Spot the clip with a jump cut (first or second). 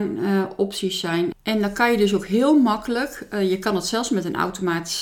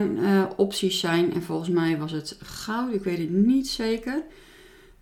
first